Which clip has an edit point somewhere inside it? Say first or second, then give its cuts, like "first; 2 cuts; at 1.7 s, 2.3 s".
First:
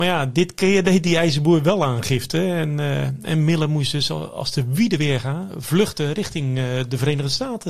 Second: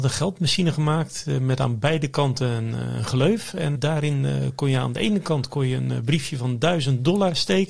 second; 1 cut; at 3.8 s